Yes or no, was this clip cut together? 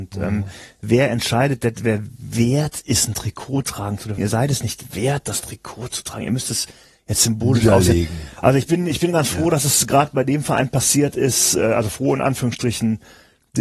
yes